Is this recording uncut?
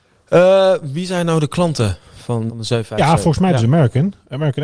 no; 1 cut; at 2.5 s

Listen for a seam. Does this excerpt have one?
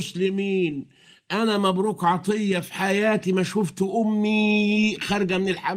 no; 0 cuts

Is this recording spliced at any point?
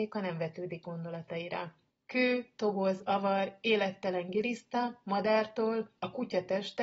yes; 1 cut; at 1.9 s

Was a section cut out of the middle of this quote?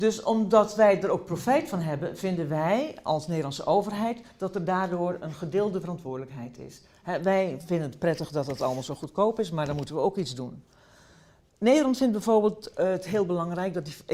no; 0 cuts

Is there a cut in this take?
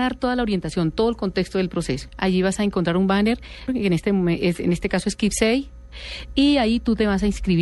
yes; 2 cuts; at 2.1 s, 3.7 s

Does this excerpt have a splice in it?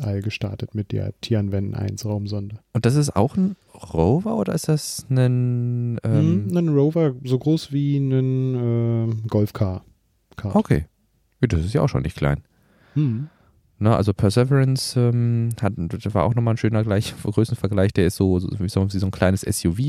no; 0 cuts

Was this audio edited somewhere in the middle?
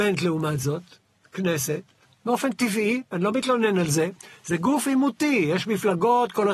no; 0 cuts

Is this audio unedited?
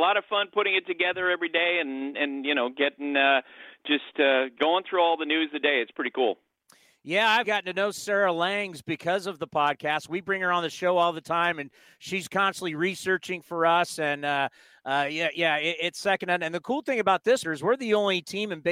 no; 2 cuts; at 7.4 s, 17.4 s

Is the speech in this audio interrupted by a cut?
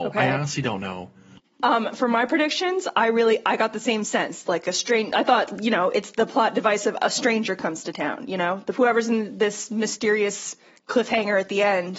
no; 0 cuts

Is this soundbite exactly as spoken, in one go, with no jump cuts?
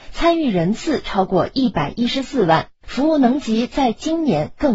yes; 0 cuts

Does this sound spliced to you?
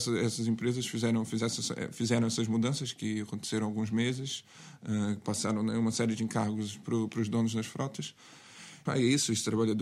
yes; 1 cut; at 8.9 s

